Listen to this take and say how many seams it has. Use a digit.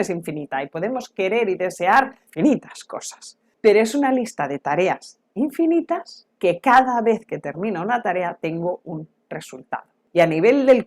0